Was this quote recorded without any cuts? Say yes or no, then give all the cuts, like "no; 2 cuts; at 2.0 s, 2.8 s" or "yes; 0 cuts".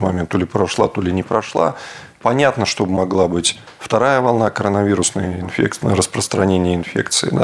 yes; 0 cuts